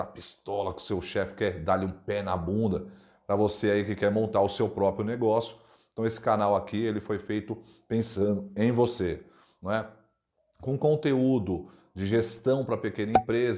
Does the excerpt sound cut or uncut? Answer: uncut